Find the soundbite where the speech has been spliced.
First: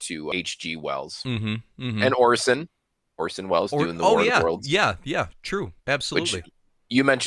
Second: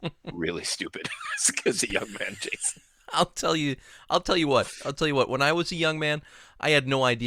first; 1 cut; at 5.8 s

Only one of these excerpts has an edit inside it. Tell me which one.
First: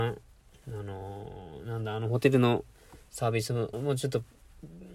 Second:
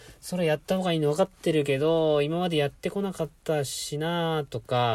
first; 1 cut; at 3.7 s

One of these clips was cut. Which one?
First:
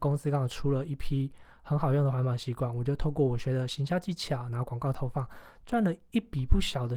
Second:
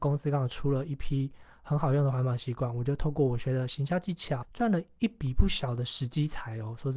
second; 1 cut; at 4.4 s

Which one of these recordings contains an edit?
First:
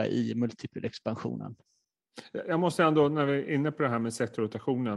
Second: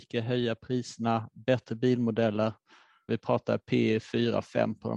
second; 1 cut; at 3.1 s

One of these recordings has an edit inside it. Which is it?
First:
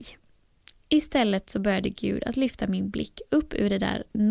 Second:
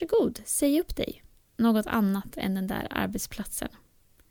second; 1 cut; at 1.4 s

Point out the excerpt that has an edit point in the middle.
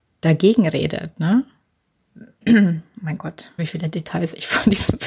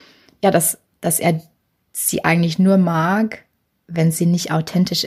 first; 2 cuts; at 2.4 s, 3.6 s

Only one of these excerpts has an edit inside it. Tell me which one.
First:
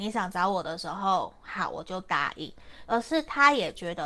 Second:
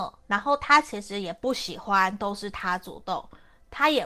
first; 1 cut; at 2.9 s

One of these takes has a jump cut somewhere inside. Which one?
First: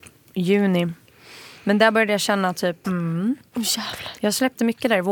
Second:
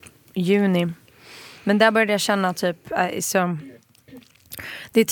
first; 1 cut; at 2.8 s

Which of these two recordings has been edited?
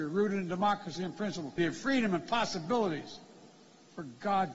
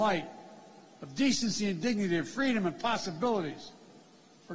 first; 1 cut; at 1.6 s

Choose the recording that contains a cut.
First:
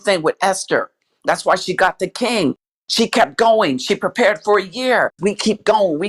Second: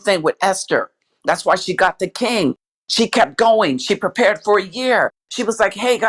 first; 1 cut; at 5.2 s

